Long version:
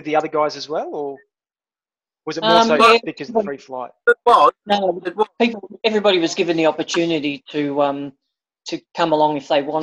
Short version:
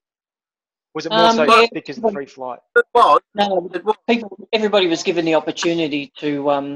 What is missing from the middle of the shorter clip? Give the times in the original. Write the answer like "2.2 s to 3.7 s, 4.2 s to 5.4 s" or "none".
none